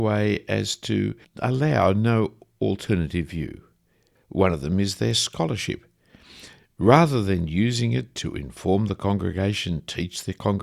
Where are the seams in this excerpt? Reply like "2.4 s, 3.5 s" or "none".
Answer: 4.2 s